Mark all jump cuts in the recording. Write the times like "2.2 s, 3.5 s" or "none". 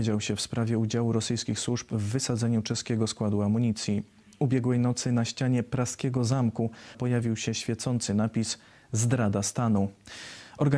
6.9 s